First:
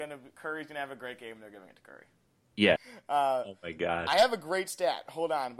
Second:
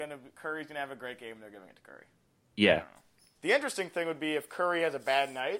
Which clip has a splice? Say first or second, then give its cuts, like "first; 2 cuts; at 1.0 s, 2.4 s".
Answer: first; 1 cut; at 2.8 s